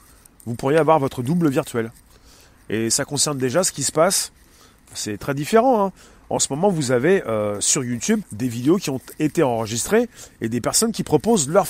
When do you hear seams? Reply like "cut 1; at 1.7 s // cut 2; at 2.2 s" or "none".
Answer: cut 1; at 8.2 s